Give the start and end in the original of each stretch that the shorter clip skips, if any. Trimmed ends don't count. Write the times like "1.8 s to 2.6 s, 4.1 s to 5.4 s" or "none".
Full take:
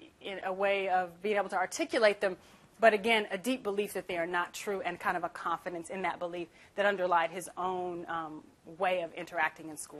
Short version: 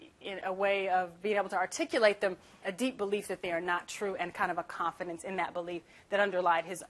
2.6 s to 3.3 s